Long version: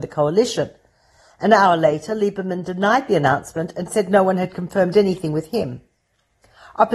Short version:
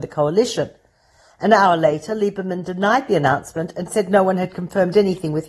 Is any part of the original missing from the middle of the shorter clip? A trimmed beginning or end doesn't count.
no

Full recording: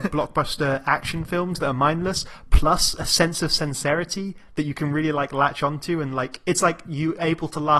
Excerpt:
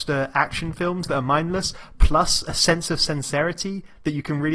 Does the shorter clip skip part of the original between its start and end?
no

